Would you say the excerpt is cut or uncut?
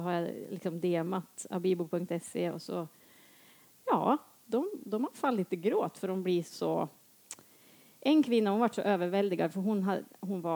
uncut